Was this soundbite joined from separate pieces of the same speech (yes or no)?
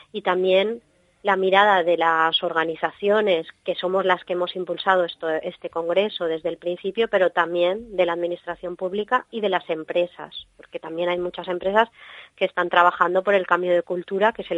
no